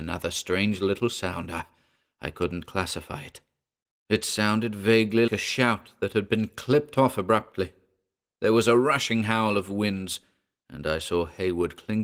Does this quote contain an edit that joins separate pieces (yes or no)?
yes